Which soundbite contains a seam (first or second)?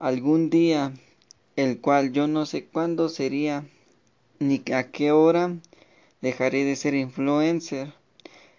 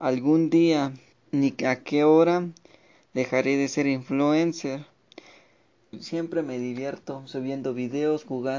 second